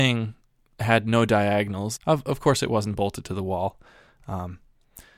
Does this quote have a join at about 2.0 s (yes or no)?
yes